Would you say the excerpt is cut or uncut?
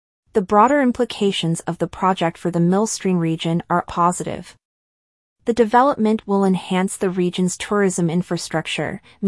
cut